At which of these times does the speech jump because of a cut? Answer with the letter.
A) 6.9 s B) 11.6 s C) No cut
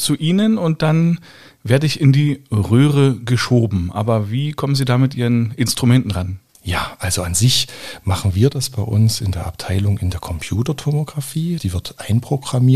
B